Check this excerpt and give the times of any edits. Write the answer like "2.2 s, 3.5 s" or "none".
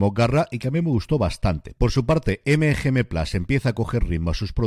1.8 s